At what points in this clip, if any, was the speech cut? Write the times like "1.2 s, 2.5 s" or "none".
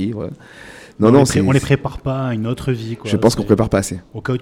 none